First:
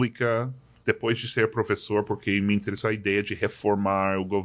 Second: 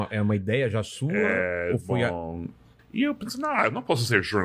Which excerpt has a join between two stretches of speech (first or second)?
second